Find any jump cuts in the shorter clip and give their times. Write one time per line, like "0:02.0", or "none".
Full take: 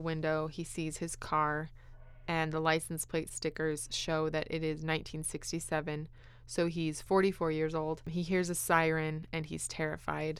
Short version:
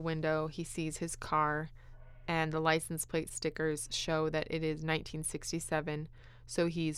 none

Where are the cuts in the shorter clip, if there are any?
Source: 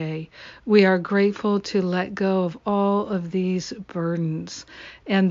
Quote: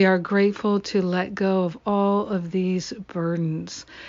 none

